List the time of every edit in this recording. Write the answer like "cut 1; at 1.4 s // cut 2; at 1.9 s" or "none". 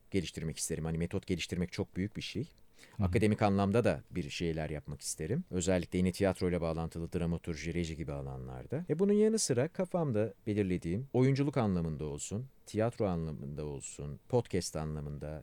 none